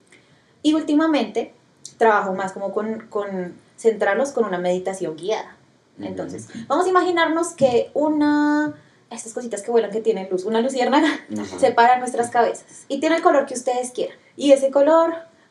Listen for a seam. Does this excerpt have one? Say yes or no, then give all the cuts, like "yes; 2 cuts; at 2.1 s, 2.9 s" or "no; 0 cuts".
yes; 1 cut; at 14.2 s